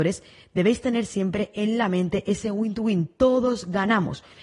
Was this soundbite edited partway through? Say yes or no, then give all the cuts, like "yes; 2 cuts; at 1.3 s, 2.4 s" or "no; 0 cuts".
no; 0 cuts